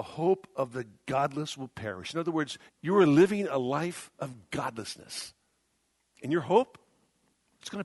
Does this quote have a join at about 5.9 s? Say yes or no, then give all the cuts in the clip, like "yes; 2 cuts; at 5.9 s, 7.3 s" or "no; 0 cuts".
no; 1 cut; at 2.7 s